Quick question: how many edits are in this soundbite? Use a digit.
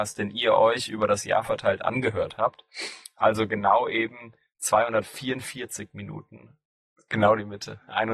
1